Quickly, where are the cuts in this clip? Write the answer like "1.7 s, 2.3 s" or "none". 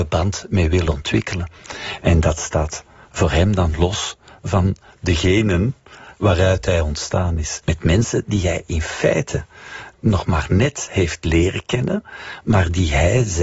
7.6 s